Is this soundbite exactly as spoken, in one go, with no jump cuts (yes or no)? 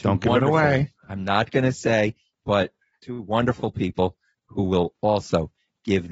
no